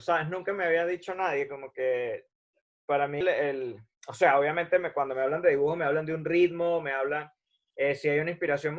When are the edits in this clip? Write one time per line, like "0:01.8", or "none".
0:03.2